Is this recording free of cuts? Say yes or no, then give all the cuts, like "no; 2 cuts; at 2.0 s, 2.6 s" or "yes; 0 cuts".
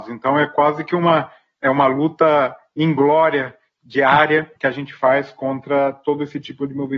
no; 1 cut; at 4.6 s